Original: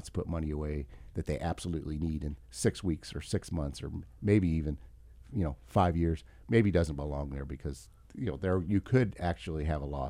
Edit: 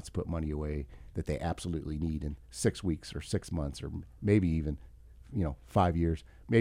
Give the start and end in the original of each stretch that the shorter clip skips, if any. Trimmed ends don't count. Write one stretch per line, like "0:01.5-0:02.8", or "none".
none